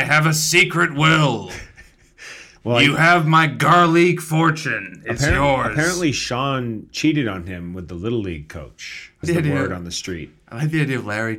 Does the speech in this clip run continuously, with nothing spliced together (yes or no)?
no